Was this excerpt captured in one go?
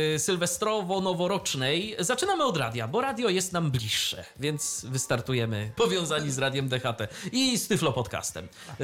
no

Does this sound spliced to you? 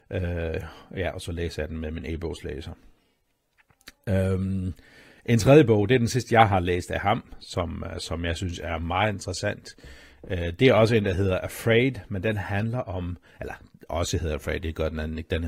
no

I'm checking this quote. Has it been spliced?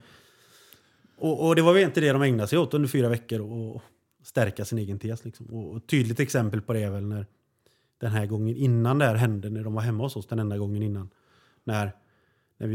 no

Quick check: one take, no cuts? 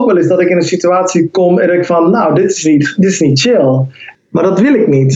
no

